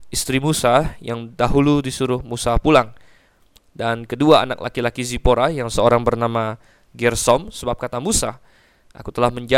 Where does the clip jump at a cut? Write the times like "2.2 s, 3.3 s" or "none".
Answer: none